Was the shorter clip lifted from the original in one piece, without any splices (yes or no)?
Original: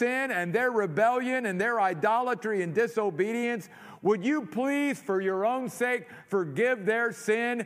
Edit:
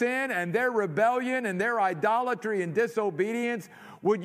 yes